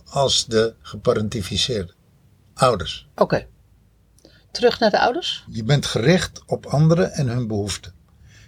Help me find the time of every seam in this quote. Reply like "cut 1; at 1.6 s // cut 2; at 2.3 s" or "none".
cut 1; at 5.5 s